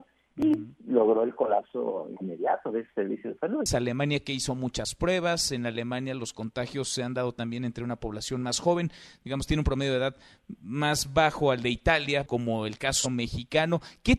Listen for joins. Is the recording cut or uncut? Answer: cut